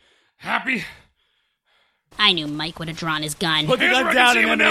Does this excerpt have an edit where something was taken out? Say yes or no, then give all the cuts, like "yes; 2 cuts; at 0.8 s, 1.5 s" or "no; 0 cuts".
yes; 1 cut; at 2.1 s